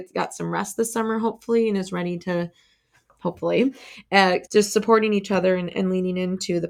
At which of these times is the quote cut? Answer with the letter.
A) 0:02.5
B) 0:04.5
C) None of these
B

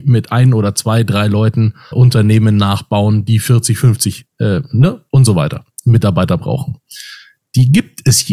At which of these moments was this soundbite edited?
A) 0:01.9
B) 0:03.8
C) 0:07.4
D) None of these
A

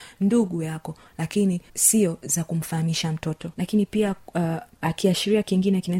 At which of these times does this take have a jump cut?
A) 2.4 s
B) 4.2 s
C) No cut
C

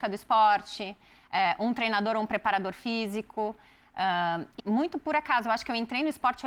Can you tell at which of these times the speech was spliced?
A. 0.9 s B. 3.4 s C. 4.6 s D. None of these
C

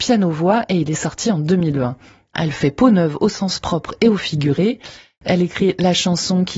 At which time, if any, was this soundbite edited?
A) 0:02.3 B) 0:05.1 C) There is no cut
A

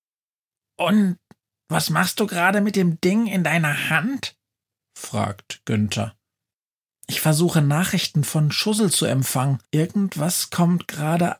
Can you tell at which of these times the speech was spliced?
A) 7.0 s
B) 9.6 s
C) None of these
B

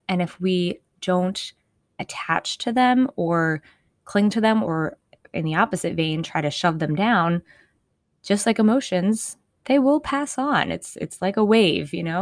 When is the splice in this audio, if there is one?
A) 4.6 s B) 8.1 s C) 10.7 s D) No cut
A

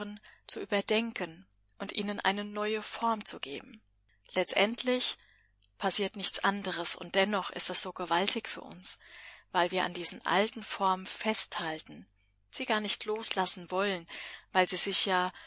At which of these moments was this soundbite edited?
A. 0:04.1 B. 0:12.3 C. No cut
C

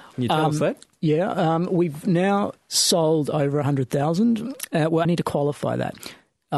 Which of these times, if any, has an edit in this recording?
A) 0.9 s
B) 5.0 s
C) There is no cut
B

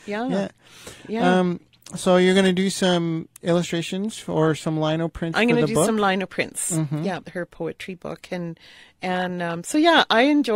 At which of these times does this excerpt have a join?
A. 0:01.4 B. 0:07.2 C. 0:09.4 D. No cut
B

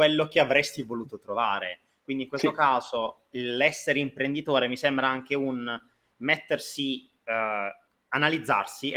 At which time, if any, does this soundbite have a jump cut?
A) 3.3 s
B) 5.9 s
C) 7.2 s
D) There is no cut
A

